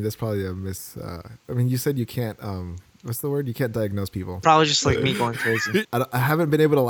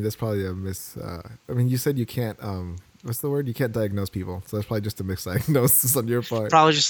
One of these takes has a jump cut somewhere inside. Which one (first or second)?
first